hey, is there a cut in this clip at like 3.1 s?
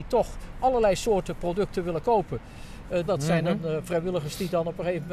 yes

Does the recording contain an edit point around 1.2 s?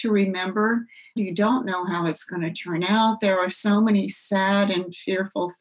yes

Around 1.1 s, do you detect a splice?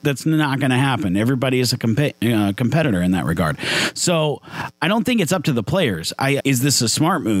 no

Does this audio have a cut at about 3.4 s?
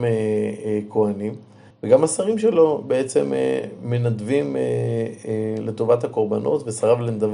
no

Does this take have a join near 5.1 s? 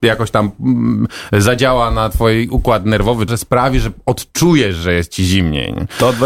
no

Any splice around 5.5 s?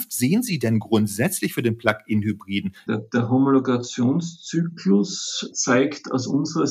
yes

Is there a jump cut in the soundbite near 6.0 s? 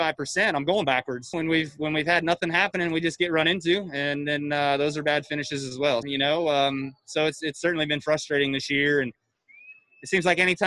yes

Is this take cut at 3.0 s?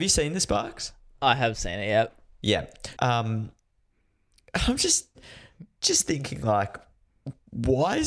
yes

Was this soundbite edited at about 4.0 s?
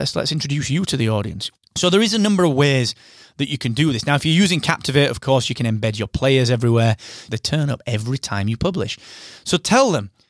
no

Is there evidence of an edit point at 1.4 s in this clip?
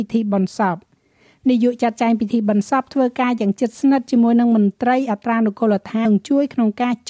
no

